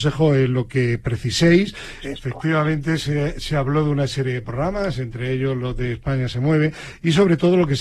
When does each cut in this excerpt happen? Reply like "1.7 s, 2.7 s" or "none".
2.0 s